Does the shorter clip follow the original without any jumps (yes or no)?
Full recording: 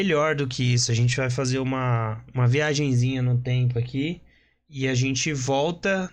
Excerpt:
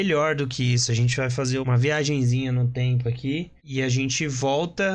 no